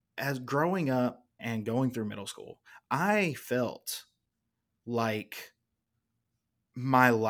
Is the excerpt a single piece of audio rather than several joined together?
no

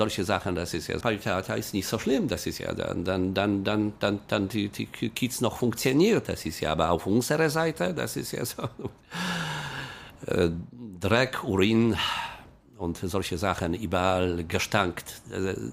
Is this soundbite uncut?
no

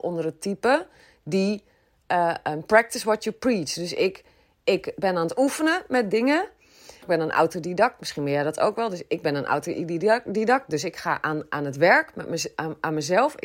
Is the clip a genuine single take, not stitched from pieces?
no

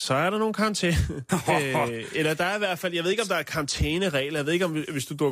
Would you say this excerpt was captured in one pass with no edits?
no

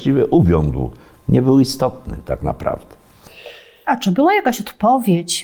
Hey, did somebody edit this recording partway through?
no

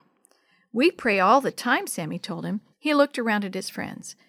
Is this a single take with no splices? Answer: no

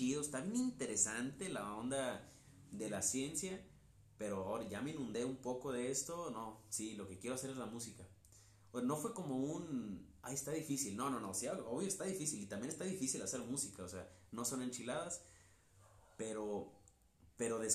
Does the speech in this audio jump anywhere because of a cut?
no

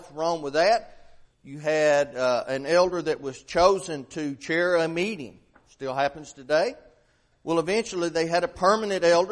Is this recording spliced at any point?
yes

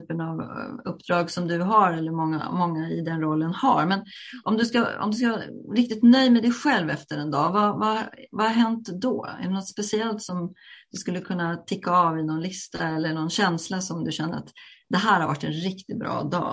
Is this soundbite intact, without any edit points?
yes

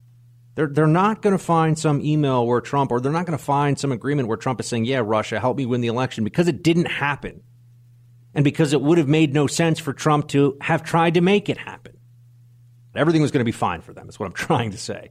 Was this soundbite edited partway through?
yes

